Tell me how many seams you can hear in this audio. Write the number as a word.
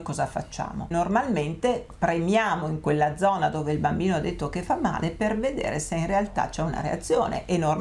zero